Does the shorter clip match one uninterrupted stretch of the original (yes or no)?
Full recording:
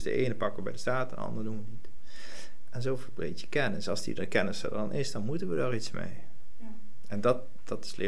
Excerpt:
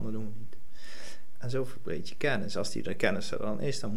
yes